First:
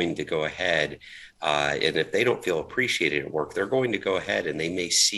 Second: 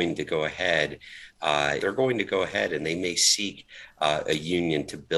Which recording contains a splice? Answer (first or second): second